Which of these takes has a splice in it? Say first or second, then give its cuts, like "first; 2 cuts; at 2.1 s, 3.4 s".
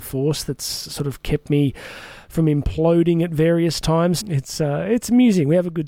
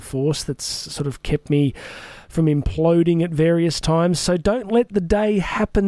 first; 1 cut; at 4.2 s